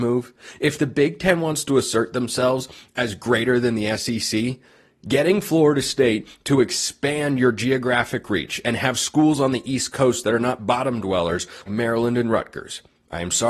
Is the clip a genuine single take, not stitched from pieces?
no; 1 cut; at 11.7 s

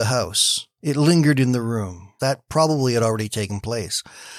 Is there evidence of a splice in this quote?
yes; 1 cut; at 2.2 s

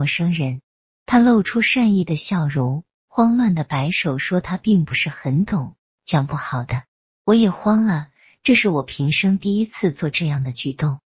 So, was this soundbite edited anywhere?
no; 0 cuts

